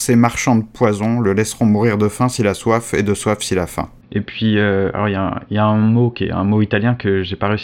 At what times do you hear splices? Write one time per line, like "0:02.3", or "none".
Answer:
0:04.0